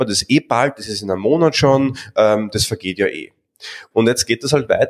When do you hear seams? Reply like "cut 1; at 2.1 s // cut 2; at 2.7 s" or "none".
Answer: cut 1; at 3.9 s